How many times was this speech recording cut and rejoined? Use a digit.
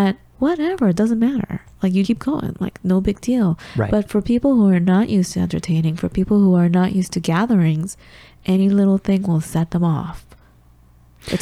1